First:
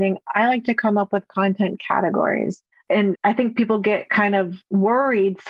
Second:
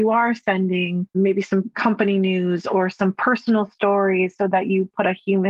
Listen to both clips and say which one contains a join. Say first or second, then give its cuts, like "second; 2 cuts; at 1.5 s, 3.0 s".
first; 1 cut; at 2.7 s